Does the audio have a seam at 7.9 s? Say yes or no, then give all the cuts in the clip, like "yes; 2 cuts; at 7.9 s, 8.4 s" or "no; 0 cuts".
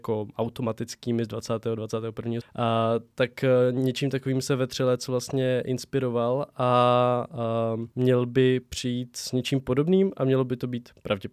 yes; 2 cuts; at 2.4 s, 7.9 s